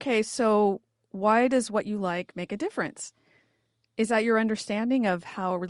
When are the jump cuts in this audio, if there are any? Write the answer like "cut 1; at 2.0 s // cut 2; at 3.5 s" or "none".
none